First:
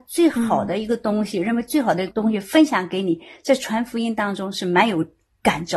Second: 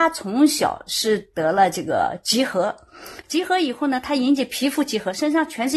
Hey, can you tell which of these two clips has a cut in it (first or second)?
first